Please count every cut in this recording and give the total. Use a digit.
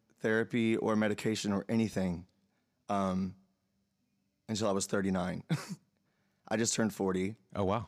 0